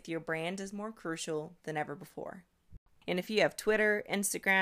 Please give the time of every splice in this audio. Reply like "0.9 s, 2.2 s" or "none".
3.0 s